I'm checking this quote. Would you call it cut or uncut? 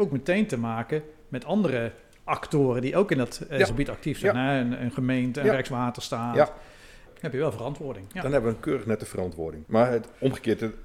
cut